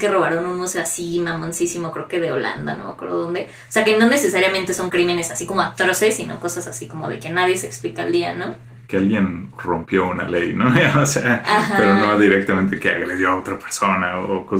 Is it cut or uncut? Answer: uncut